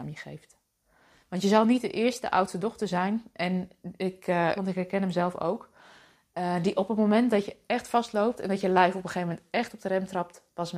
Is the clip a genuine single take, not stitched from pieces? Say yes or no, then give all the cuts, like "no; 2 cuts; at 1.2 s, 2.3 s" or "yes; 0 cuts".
no; 1 cut; at 4.6 s